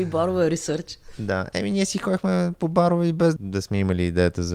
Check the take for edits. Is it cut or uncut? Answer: cut